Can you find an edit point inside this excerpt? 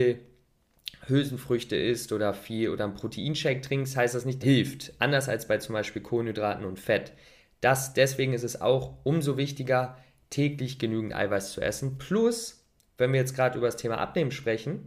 yes; 1 cut; at 4.4 s

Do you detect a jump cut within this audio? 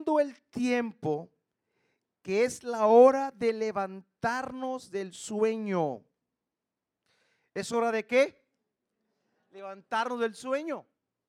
no; 0 cuts

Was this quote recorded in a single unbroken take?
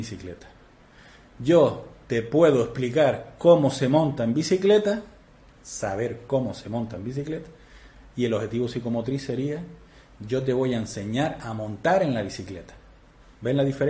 no; 1 cut; at 5.5 s

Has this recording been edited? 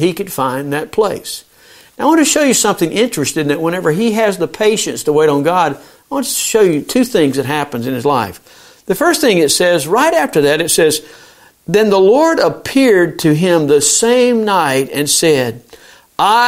no; 0 cuts

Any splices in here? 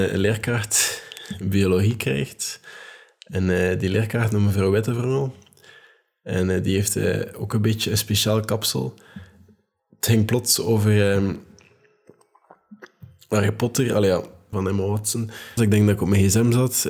yes; 2 cuts; at 14.5 s, 15.6 s

